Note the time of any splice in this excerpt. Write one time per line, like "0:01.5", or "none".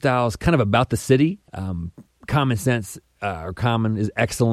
0:01.5